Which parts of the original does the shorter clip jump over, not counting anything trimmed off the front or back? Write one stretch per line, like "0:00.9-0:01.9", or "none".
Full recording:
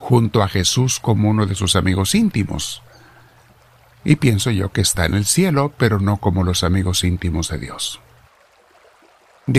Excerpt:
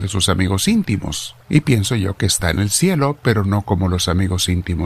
0:02.9-0:04.0